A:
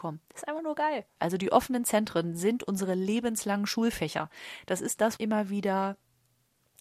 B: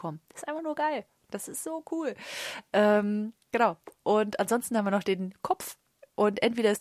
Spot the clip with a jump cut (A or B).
A